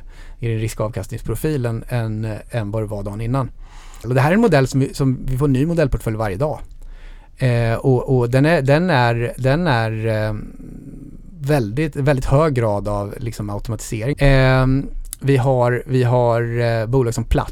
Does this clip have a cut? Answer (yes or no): yes